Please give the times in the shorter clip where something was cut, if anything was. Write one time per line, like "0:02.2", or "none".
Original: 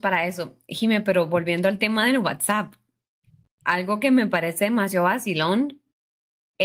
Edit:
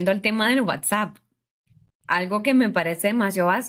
none